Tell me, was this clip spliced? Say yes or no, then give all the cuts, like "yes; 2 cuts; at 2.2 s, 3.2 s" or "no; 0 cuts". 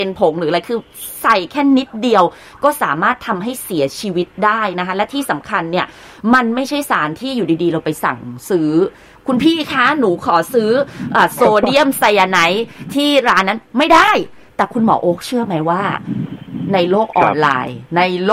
no; 0 cuts